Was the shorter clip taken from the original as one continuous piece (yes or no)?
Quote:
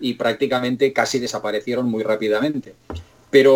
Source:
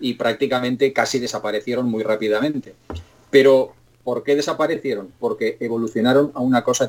yes